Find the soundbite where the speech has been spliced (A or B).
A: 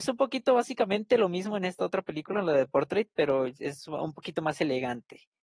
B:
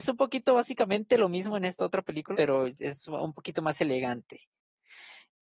B